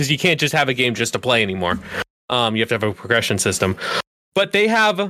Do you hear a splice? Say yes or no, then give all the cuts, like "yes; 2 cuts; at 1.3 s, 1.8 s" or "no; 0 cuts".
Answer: no; 0 cuts